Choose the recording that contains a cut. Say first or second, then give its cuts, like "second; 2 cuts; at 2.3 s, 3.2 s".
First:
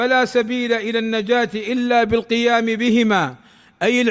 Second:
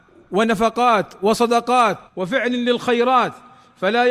second; 1 cut; at 2.1 s